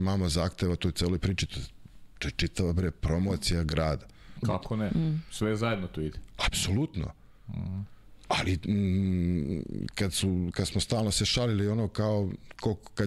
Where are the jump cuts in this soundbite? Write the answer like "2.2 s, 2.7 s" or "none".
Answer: 4.4 s

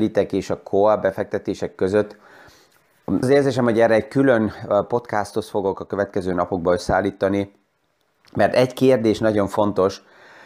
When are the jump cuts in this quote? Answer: 3.2 s

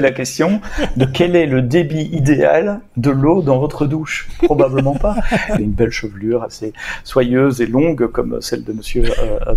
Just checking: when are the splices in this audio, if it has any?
5.6 s

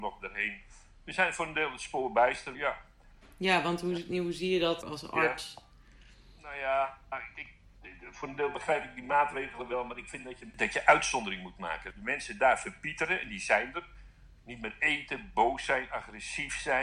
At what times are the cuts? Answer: 2.5 s

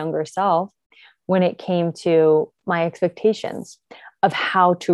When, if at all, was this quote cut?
none

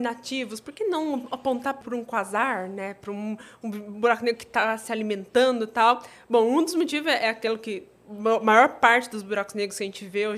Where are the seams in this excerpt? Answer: 1.8 s

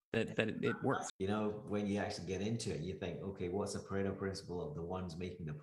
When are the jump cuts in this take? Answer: 1.1 s

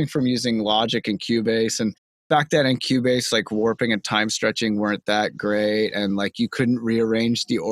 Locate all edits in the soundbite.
none

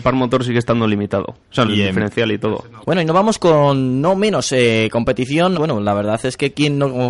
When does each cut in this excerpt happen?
1.6 s, 2.8 s, 5.5 s

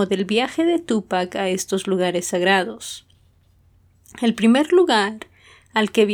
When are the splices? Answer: none

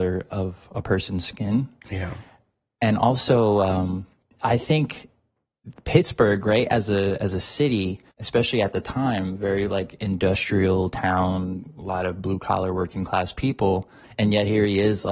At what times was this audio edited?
8.1 s, 14.0 s

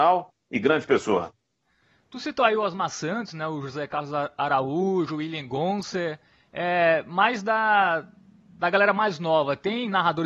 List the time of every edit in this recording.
none

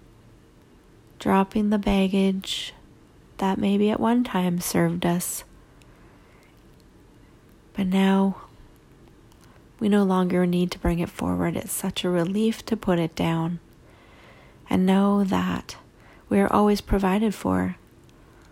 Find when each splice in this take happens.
none

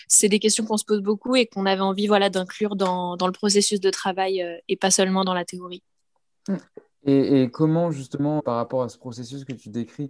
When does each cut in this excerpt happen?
8.4 s

